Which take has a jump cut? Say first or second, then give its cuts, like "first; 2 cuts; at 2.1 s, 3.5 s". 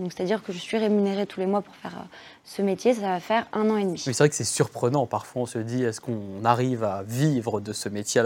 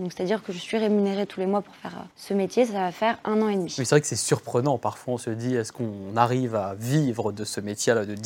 second; 1 cut; at 2.1 s